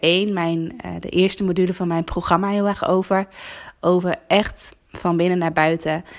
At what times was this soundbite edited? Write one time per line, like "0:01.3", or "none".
none